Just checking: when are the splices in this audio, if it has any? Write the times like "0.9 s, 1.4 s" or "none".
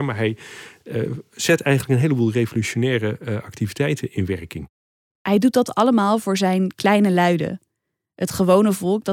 none